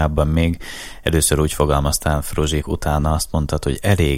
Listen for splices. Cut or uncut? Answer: cut